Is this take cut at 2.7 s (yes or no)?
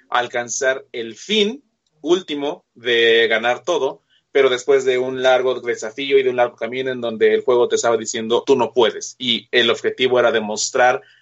no